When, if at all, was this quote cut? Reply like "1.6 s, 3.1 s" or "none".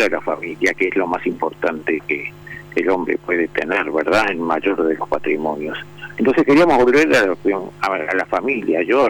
none